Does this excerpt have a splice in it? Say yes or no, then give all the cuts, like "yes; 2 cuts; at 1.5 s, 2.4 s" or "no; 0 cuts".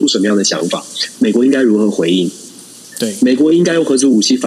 yes; 1 cut; at 1.1 s